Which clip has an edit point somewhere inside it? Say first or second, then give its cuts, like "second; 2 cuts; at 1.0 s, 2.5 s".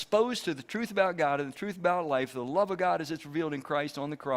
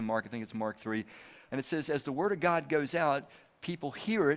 second; 1 cut; at 1.5 s